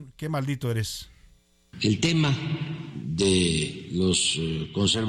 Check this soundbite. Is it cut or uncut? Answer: uncut